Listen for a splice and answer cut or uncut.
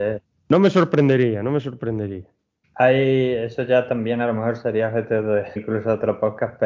cut